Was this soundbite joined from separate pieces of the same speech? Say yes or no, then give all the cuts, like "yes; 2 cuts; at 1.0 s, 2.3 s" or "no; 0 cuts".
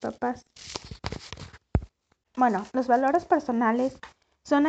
yes; 1 cut; at 2.2 s